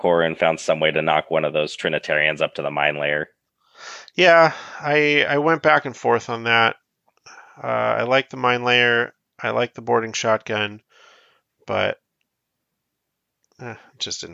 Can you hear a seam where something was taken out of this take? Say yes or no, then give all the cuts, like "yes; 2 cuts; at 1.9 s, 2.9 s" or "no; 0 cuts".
no; 0 cuts